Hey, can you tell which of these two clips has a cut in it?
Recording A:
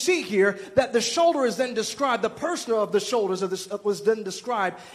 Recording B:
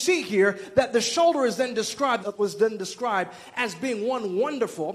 B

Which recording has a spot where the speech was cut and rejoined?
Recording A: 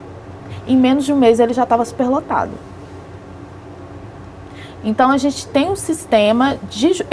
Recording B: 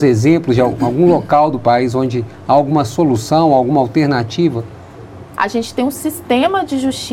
B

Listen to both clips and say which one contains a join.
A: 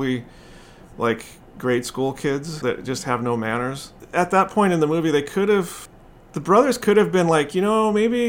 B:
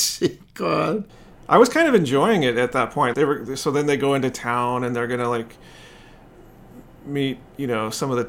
B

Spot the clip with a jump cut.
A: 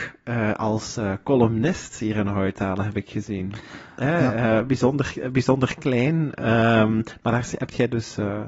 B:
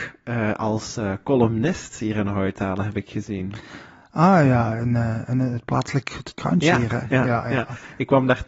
A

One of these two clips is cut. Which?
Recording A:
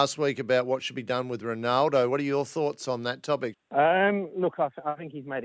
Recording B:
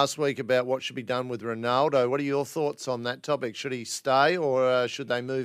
A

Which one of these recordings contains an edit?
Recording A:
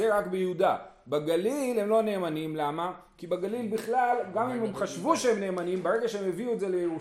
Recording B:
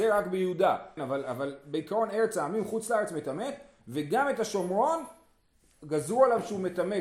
B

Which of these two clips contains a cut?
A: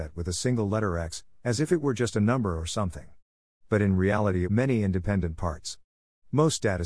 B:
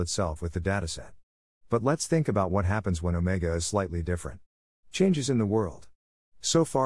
A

